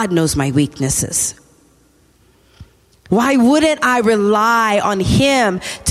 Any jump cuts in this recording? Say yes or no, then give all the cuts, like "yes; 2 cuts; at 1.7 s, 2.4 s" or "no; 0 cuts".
yes; 1 cut; at 3.1 s